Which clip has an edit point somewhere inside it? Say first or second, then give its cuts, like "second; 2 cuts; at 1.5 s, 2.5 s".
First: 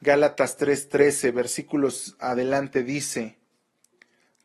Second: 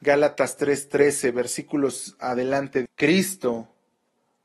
second; 1 cut; at 2.9 s